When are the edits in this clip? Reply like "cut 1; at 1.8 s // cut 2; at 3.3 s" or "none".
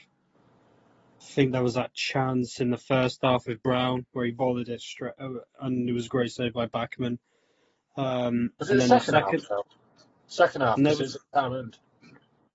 none